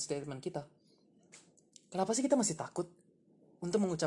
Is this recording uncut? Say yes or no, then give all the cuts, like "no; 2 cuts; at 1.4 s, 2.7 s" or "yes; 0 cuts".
yes; 0 cuts